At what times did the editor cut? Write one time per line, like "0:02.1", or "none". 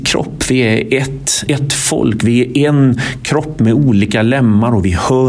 0:01.5

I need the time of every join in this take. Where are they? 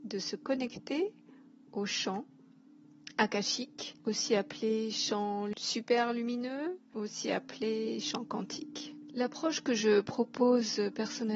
none

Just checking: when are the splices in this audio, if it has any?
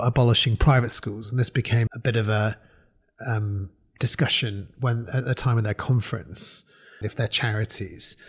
0:01.9
0:07.0

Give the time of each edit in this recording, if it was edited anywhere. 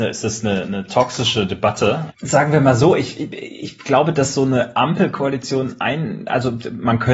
0:02.1

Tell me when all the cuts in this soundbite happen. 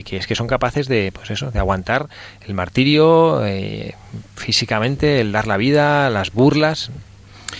none

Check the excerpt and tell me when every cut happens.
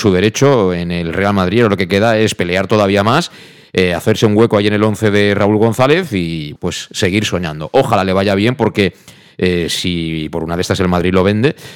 0:06.6

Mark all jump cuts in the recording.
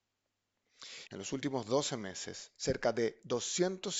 0:01.1
0:02.5

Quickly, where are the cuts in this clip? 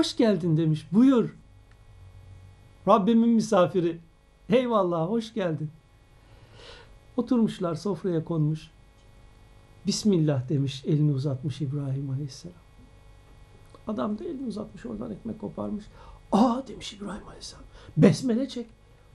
none

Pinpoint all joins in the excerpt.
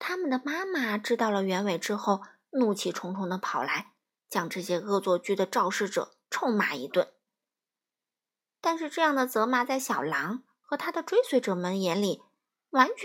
none

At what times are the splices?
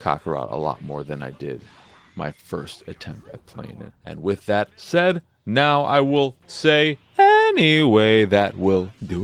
none

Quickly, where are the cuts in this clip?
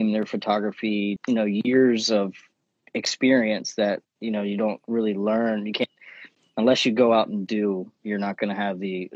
0:01.2

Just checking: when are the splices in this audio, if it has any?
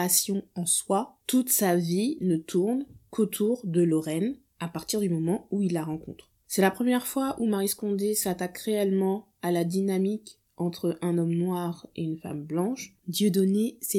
0:13.0

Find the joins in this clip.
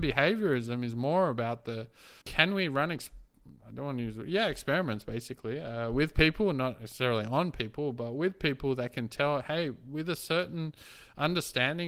0:02.2

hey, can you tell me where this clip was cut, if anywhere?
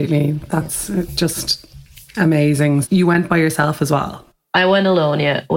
0:02.8

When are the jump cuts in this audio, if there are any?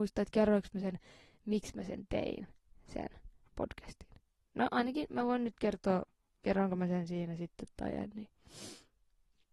none

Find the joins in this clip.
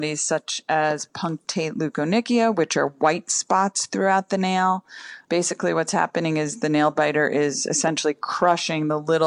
0:05.2

